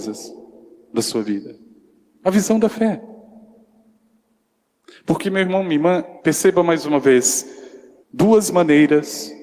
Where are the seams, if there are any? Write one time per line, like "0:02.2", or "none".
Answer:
0:06.2
0:08.0